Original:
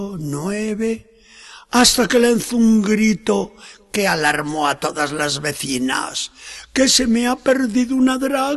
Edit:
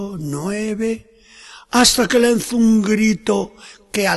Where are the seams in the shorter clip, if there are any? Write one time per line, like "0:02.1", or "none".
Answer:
none